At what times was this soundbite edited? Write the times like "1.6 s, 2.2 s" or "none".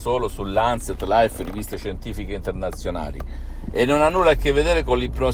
none